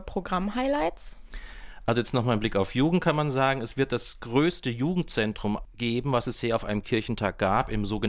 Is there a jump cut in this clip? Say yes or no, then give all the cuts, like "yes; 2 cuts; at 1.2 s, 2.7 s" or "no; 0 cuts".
no; 0 cuts